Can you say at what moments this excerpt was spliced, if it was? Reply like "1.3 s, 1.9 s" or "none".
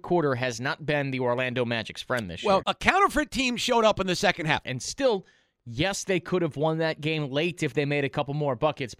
2.6 s, 4.6 s

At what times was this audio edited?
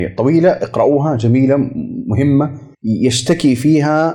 2.7 s

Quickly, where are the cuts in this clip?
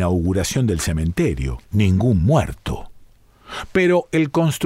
1.6 s

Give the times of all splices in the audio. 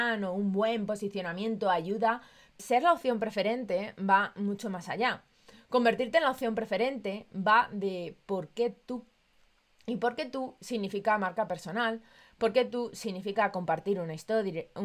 2.6 s

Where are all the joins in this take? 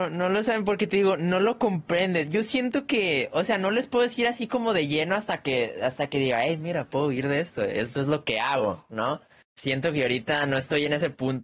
none

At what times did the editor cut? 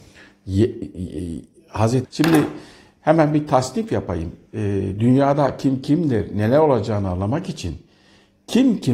2.0 s

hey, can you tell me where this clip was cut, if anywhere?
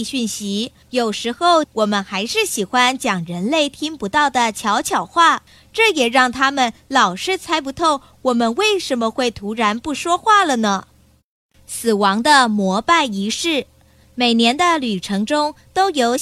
1.6 s

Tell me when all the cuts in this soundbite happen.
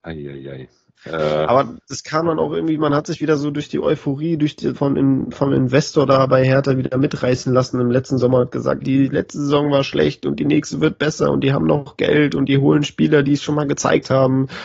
4.7 s, 8.8 s

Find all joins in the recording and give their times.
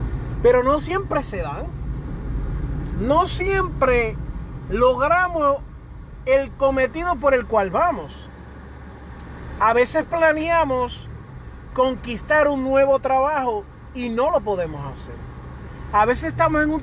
none

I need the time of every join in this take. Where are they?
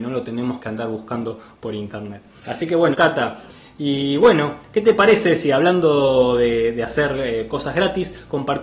2.9 s

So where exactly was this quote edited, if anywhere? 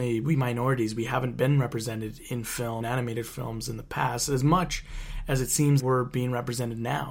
2.8 s, 5.8 s

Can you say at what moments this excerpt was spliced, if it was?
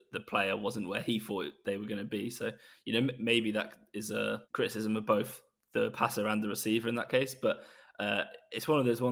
4.4 s

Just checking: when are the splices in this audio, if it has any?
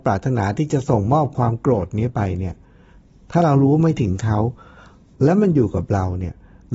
none

